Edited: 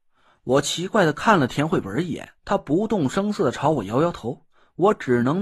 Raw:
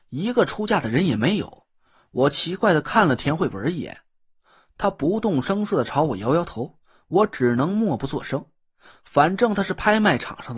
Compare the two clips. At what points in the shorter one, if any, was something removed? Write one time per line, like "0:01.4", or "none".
0:02.4